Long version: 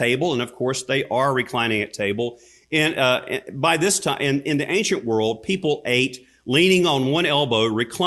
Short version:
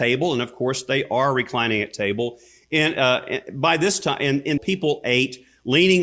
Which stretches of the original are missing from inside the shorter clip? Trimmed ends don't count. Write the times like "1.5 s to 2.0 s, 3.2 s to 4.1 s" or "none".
4.6 s to 5.4 s